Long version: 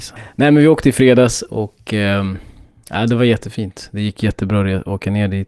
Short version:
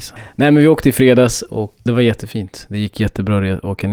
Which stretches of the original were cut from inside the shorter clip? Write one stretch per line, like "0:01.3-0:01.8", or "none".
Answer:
0:01.9-0:03.1